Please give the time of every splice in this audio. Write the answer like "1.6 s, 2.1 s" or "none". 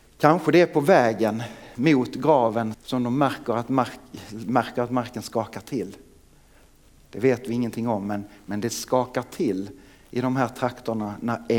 2.7 s